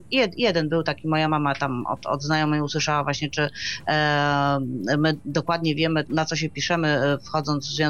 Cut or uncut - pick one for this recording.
cut